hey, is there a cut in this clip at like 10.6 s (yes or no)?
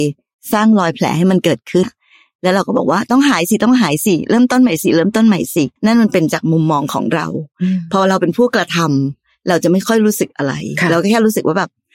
no